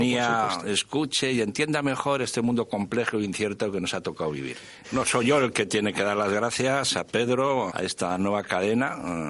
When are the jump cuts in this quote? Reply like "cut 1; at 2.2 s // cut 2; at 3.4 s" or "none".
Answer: cut 1; at 4.8 s // cut 2; at 7.7 s